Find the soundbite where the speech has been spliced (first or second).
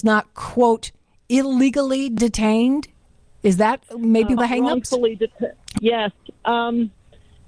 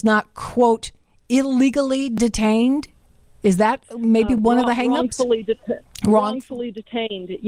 first